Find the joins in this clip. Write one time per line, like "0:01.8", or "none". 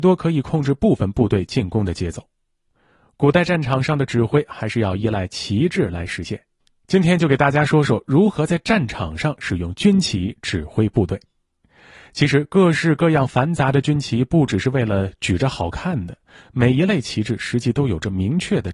none